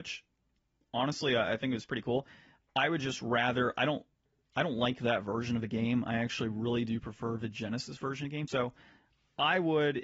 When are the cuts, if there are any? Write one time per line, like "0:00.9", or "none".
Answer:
0:08.5